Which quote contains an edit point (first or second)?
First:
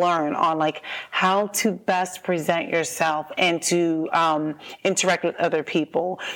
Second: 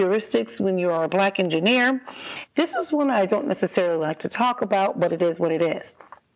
second